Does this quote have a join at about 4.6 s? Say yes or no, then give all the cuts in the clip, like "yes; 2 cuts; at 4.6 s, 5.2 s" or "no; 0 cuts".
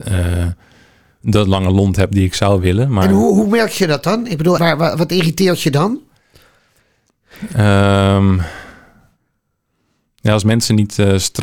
yes; 1 cut; at 4.6 s